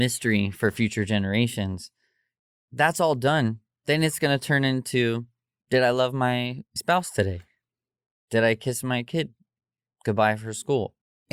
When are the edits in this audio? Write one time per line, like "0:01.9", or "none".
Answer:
none